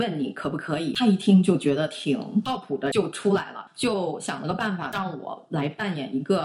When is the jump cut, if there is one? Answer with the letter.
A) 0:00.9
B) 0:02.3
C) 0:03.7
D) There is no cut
C